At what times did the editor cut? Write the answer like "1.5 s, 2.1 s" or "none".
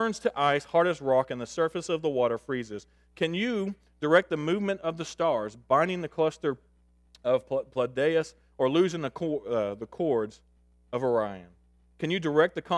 none